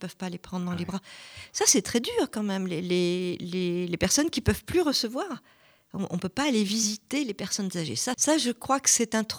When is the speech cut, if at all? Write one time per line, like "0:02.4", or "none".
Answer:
0:08.1